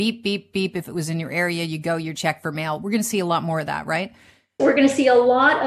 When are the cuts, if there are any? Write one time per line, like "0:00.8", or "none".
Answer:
0:04.6

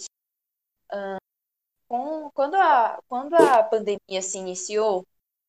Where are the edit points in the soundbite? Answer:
none

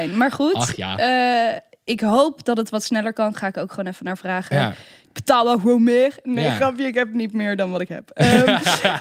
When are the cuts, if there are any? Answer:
none

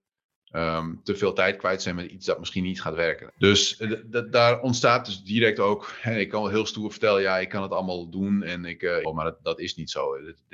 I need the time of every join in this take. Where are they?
0:03.3
0:09.0

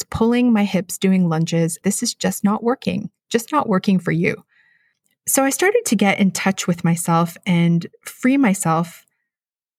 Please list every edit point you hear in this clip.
0:01.8

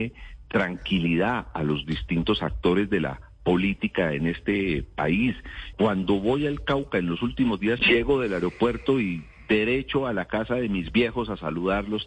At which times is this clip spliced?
0:05.7
0:07.8

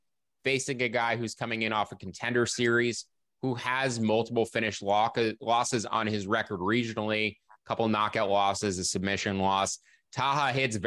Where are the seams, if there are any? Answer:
none

